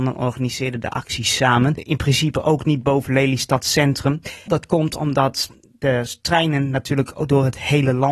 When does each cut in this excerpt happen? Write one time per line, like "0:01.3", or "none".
0:01.8
0:04.5